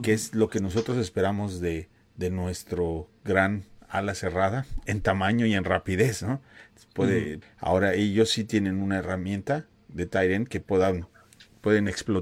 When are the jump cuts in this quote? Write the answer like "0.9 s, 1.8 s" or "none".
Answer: 7.4 s

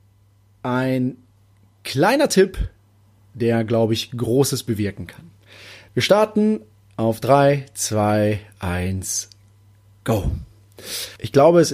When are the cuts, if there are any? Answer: none

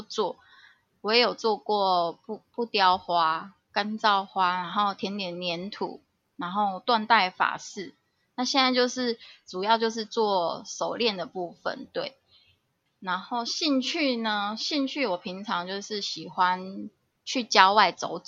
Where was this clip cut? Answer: 12.9 s

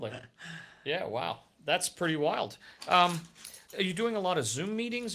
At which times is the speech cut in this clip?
3.7 s

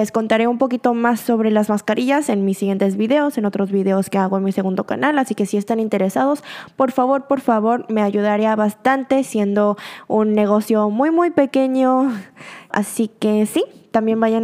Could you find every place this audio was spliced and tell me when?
12.7 s

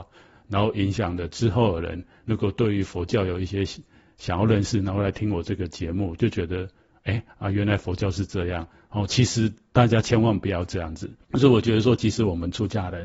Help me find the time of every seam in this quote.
none

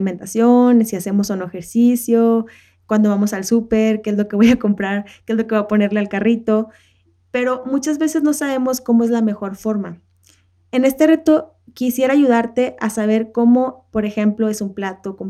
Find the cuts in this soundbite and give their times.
none

